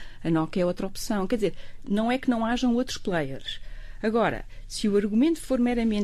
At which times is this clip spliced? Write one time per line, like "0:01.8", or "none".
none